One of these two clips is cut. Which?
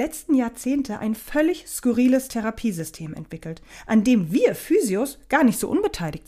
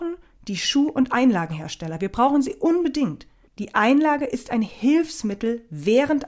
second; 1 cut; at 3.5 s

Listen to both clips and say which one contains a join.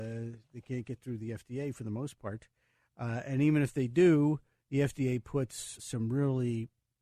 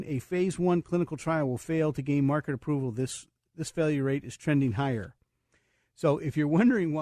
first; 1 cut; at 5.8 s

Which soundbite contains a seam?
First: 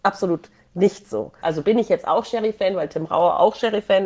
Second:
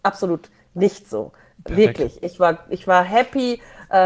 first; 1 cut; at 1.4 s

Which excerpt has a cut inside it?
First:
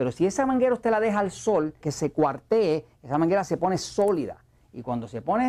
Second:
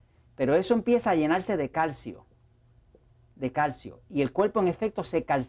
first; 1 cut; at 1.8 s

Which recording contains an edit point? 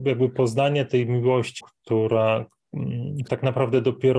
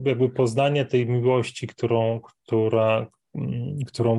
first; 2 cuts; at 1.6 s, 3.3 s

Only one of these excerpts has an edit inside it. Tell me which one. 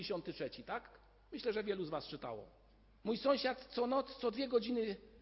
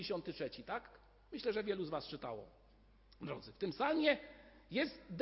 first; 1 cut; at 3.0 s

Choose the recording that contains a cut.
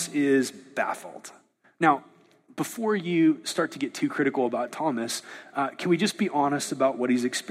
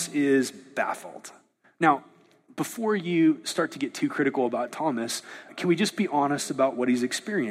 second; 1 cut; at 5.5 s

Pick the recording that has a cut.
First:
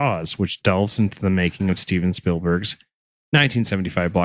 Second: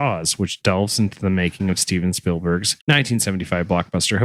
second; 1 cut; at 2.8 s

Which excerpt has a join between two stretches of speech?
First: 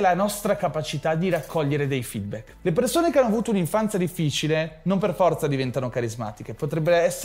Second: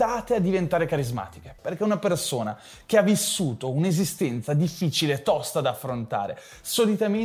second; 1 cut; at 1.6 s

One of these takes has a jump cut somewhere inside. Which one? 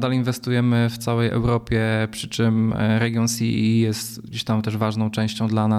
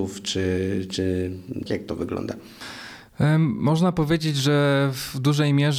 second; 1 cut; at 1.7 s

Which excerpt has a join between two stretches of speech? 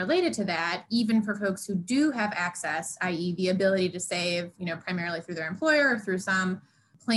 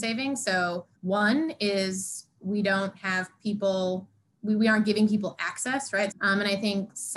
second; 2 cuts; at 0.9 s, 6.1 s

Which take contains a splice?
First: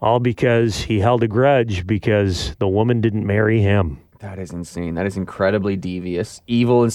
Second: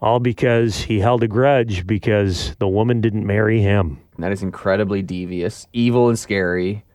second; 1 cut; at 4.2 s

